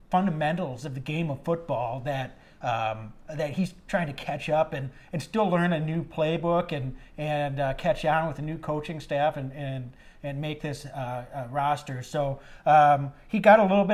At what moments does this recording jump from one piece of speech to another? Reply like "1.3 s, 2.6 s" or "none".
none